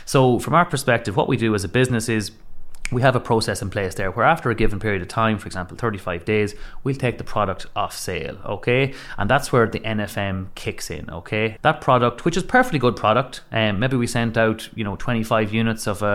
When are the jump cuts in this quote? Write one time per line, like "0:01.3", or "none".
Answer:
0:11.6